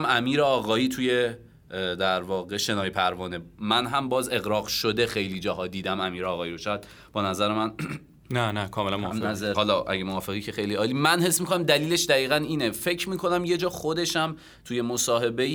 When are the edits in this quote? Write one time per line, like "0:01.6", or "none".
0:09.5